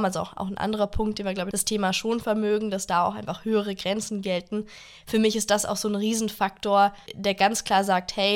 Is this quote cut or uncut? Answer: cut